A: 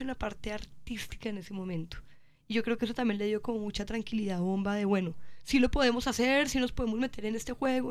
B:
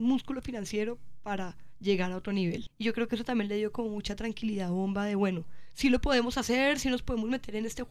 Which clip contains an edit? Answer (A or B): B